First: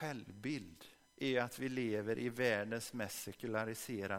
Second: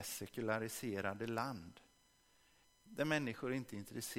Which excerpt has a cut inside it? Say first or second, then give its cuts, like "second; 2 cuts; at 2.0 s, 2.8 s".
second; 1 cut; at 2.6 s